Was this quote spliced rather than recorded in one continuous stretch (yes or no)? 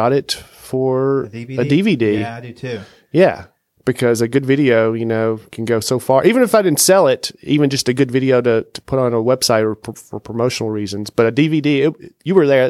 no